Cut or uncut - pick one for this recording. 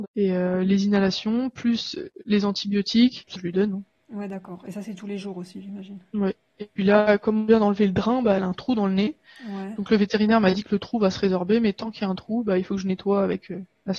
cut